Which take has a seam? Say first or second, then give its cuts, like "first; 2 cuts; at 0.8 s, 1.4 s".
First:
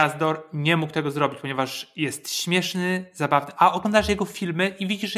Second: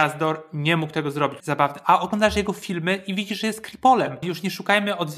second; 2 cuts; at 1.4 s, 4.2 s